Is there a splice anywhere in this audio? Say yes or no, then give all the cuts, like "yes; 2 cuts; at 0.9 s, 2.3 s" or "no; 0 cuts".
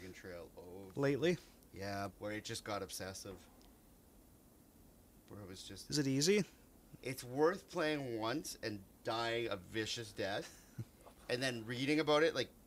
yes; 2 cuts; at 2.1 s, 7.0 s